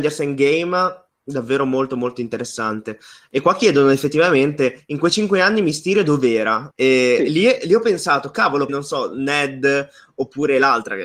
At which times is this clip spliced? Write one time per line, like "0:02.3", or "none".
0:06.7
0:08.7